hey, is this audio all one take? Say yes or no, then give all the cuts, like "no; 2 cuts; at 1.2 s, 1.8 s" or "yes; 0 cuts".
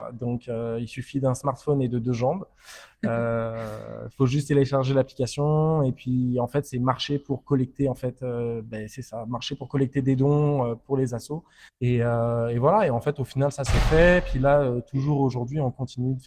no; 1 cut; at 11.7 s